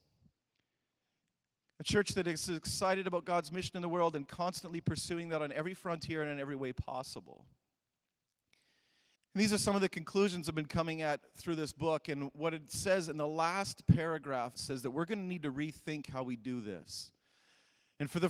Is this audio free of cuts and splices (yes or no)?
no